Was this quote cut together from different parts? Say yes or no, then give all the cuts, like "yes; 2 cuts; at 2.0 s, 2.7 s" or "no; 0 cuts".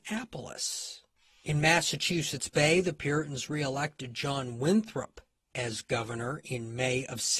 no; 0 cuts